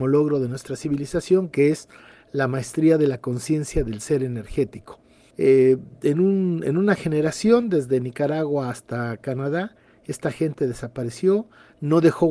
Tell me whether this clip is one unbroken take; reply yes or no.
no